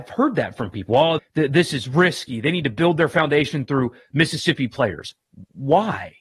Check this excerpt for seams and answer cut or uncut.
cut